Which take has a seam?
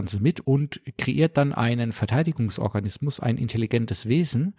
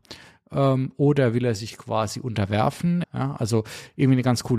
second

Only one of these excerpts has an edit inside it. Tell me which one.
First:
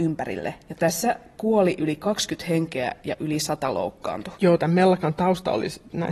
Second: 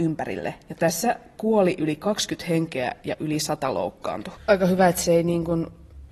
second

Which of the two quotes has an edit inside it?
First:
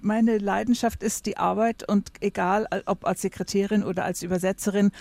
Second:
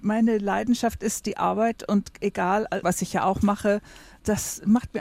second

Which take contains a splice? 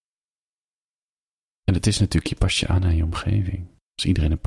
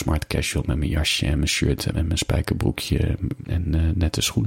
second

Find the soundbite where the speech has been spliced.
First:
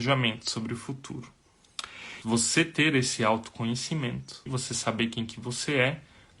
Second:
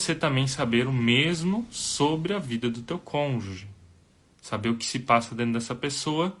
first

